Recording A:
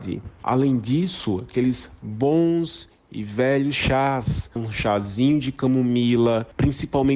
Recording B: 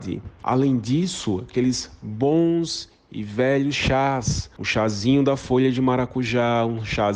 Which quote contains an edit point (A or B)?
A